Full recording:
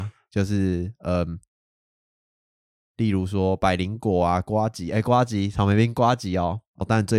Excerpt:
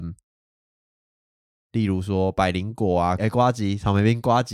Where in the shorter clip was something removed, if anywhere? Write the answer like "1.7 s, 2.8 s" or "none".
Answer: 3.2 s